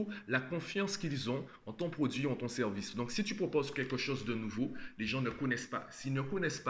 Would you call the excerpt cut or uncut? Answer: uncut